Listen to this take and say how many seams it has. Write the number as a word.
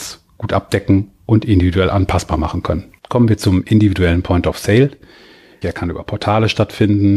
two